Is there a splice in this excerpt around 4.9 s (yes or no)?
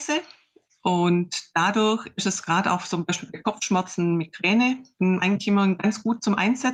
yes